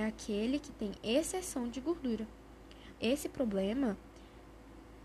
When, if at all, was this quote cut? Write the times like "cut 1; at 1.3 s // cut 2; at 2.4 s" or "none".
cut 1; at 3.0 s